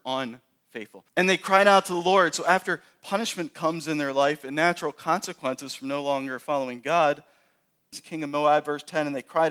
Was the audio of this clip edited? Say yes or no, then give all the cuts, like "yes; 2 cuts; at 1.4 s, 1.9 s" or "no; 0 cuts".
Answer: yes; 2 cuts; at 1.1 s, 7.9 s